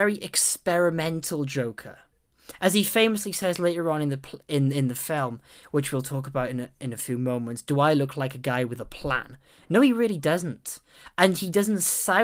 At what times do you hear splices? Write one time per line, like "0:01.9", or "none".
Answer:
none